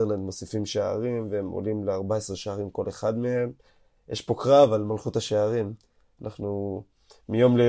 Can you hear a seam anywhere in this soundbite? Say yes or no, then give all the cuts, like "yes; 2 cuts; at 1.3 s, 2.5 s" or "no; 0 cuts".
no; 0 cuts